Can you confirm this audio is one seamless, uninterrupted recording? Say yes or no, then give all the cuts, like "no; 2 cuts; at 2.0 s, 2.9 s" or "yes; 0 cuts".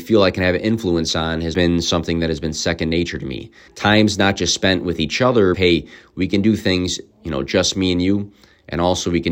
no; 3 cuts; at 1.5 s, 3.7 s, 5.5 s